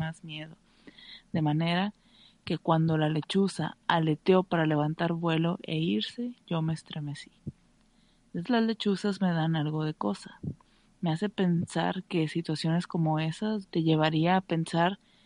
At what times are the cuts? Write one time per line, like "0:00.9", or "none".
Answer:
0:08.4
0:13.6